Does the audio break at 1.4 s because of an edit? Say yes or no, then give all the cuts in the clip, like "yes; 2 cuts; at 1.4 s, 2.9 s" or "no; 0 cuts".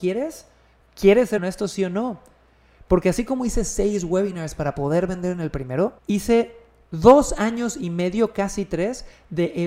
yes; 2 cuts; at 1.4 s, 6.0 s